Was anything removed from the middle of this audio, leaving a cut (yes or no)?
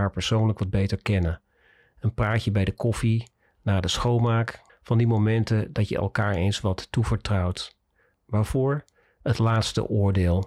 yes